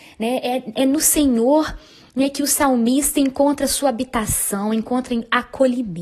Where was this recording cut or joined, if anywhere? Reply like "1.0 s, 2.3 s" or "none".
none